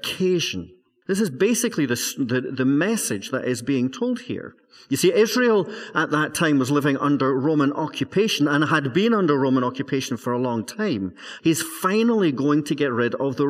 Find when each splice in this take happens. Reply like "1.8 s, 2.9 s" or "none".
1.0 s, 11.4 s